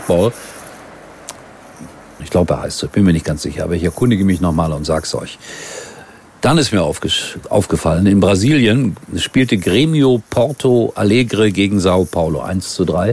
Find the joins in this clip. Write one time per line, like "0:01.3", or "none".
0:02.2